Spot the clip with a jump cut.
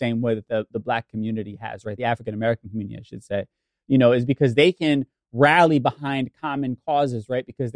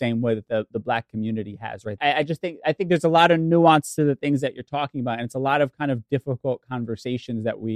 second; 1 cut; at 2.0 s

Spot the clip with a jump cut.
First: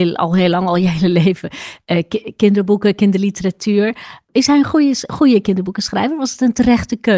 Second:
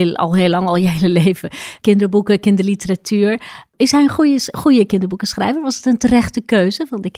second; 1 cut; at 1.8 s

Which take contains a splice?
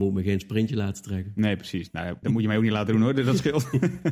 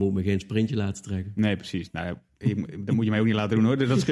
first; 1 cut; at 2.2 s

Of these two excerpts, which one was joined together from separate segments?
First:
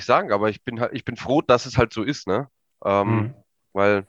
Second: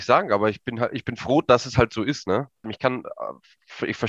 second; 1 cut; at 2.6 s

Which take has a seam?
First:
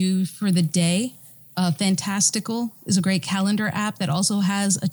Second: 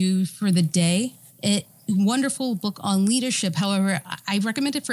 second; 1 cut; at 1.3 s

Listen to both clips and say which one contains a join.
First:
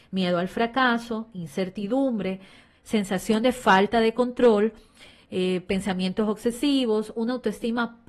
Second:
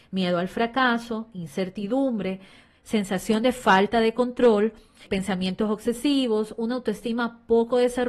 second; 1 cut; at 5.1 s

